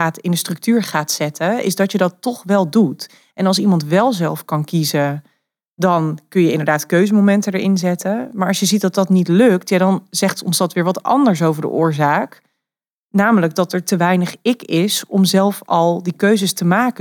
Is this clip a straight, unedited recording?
yes; 0 cuts

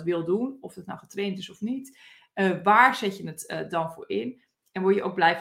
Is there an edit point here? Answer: no; 0 cuts

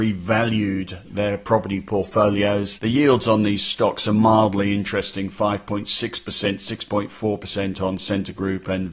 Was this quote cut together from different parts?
yes; 1 cut; at 2.8 s

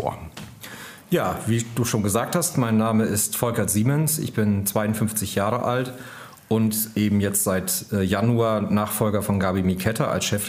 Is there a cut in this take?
no; 0 cuts

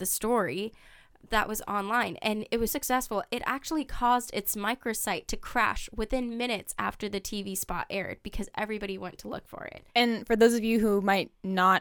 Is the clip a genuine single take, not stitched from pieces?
no; 2 cuts; at 2.7 s, 9.9 s

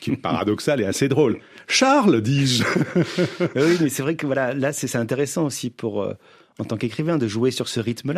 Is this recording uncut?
yes; 0 cuts

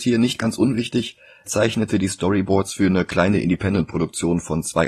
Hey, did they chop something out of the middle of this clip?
yes; 1 cut; at 1.5 s

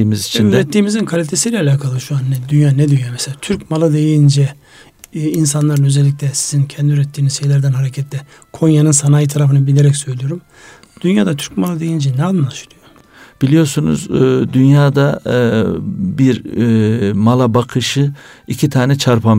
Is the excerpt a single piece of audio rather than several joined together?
yes; 0 cuts

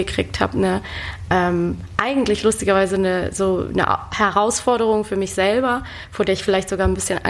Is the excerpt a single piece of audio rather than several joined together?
yes; 0 cuts

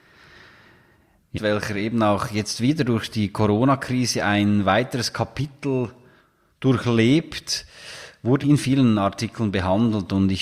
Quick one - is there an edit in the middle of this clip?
yes; 2 cuts; at 1.3 s, 8.4 s

